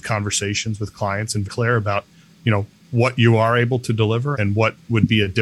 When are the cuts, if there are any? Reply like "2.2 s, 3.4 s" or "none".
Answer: 1.4 s, 4.3 s